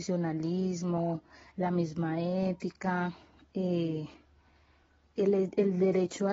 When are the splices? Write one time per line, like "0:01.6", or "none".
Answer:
none

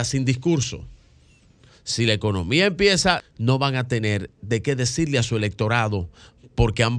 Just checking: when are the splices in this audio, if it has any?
0:01.7
0:03.2

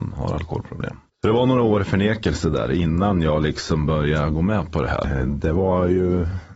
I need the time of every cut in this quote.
0:01.1
0:05.0

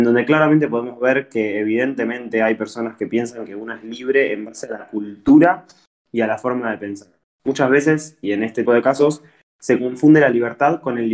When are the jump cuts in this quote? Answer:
0:08.7

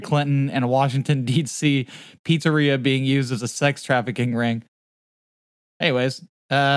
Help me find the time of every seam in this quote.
none

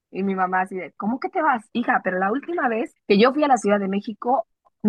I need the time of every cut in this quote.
0:01.7
0:03.0

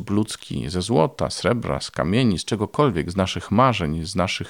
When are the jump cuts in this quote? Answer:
none

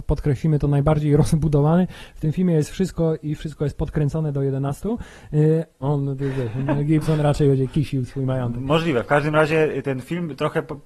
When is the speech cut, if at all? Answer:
0:05.8
0:09.8

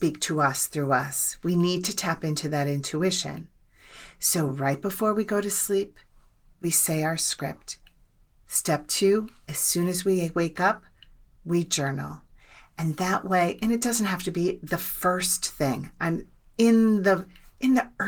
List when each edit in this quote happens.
none

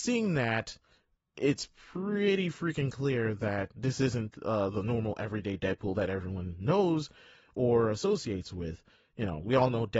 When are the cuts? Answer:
none

